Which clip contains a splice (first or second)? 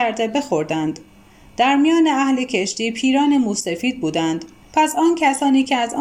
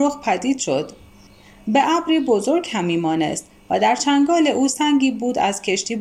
first